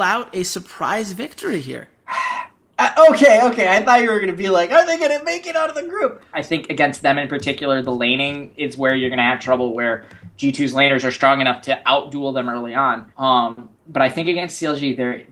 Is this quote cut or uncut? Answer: cut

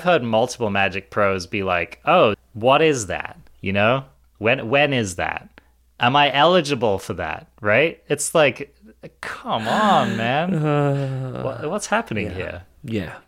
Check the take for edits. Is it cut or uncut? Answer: cut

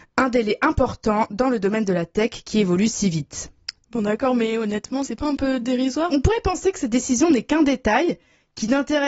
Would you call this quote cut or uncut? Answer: cut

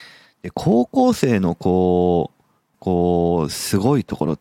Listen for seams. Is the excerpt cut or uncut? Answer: cut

